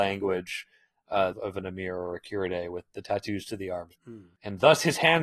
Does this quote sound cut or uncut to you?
cut